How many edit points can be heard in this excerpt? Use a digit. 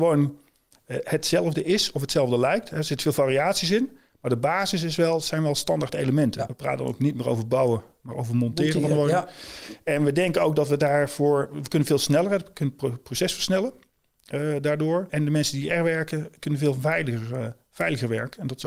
2